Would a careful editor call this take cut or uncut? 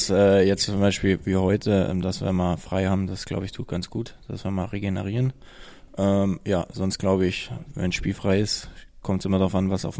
uncut